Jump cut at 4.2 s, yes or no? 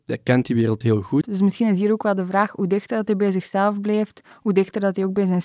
no